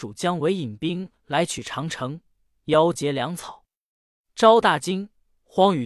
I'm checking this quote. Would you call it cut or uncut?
uncut